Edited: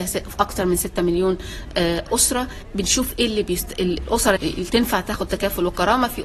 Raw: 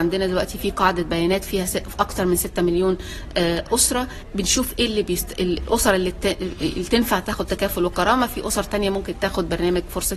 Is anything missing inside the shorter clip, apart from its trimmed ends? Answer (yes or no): yes